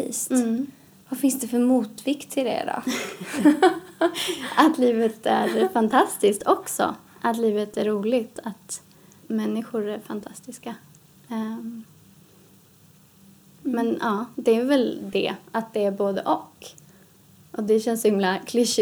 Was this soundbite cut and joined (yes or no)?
no